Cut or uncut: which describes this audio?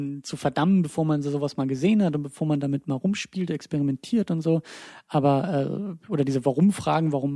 uncut